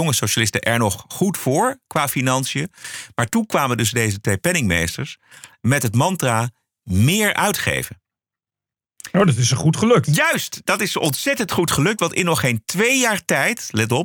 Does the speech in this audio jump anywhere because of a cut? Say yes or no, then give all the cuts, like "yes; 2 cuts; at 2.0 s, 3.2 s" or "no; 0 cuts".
no; 0 cuts